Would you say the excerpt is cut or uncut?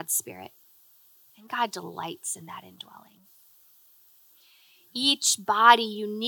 uncut